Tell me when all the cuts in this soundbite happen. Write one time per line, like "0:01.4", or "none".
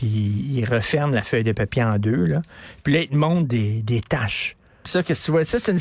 0:04.9